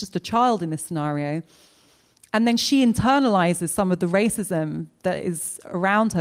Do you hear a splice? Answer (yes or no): no